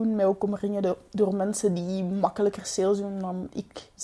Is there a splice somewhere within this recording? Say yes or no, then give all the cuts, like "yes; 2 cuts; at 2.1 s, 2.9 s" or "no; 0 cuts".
no; 0 cuts